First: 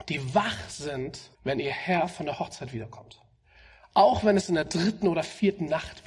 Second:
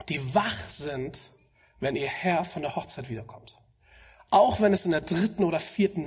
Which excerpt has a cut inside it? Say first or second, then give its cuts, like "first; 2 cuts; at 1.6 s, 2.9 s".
first; 1 cut; at 1.3 s